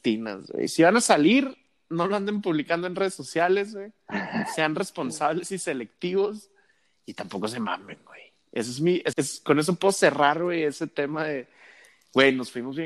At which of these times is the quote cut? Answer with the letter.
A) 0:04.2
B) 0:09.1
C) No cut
B